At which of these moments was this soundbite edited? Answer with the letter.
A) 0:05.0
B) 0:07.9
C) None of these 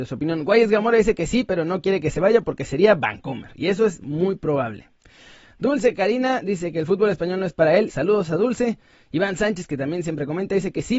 B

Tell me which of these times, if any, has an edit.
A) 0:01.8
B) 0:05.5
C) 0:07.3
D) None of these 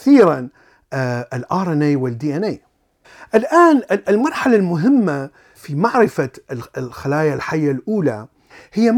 B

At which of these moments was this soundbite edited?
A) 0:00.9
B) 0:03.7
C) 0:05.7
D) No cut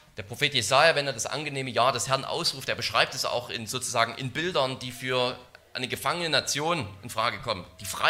D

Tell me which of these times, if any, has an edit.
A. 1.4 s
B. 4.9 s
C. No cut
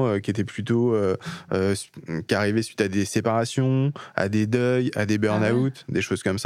C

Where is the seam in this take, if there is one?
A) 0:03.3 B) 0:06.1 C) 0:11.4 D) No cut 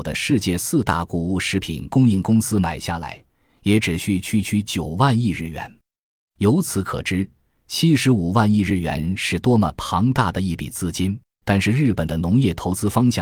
C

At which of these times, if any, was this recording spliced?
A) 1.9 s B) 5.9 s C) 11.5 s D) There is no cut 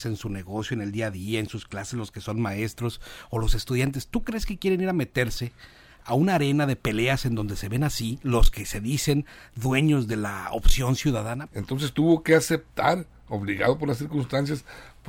C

